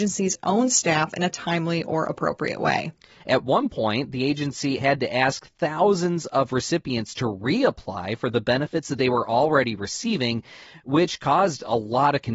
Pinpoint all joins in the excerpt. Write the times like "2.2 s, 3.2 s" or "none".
3.2 s, 4.8 s